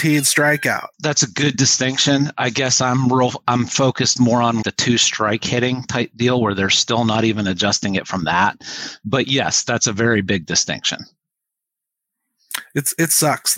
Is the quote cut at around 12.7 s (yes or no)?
no